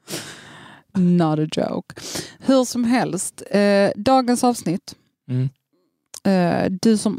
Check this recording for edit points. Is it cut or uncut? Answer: uncut